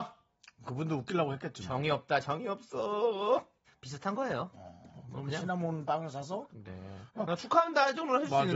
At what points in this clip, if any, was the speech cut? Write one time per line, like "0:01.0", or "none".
0:03.7
0:06.5